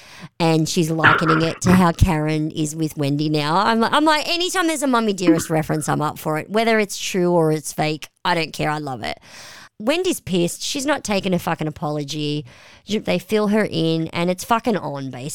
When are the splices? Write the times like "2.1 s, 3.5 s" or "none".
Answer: 13.0 s